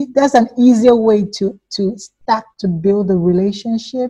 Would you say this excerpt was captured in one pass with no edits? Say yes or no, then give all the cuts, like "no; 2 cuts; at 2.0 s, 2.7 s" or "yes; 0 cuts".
yes; 0 cuts